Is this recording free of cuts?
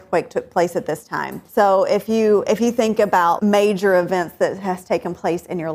no; 2 cuts; at 1.5 s, 3.4 s

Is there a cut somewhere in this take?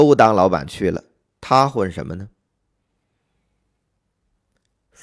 no; 0 cuts

